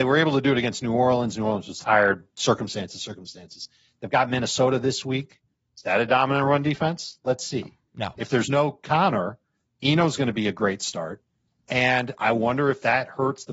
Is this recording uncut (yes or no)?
yes